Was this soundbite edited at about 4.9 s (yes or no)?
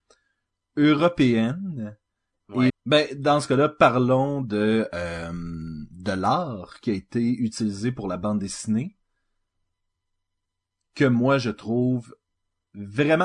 no